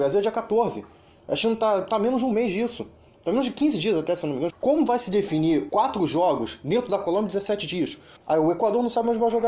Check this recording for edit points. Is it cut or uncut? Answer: cut